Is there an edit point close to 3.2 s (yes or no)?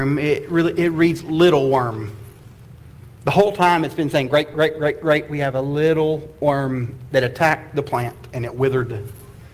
no